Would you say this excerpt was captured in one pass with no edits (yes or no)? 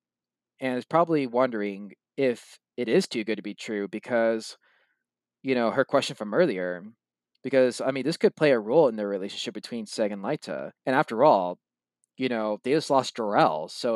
no